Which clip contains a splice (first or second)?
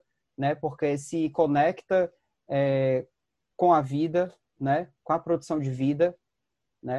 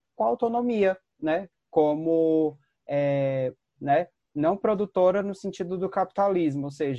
second